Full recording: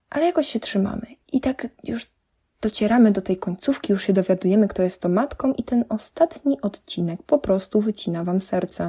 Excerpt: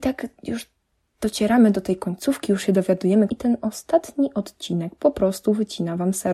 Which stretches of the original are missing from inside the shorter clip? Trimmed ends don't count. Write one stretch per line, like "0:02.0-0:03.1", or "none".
0:04.7-0:05.6